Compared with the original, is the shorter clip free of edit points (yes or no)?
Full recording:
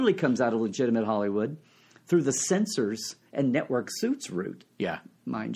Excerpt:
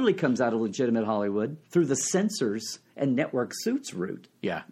no